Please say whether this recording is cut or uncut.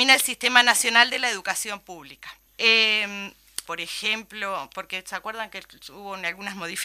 cut